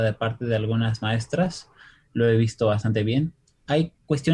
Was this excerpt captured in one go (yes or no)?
yes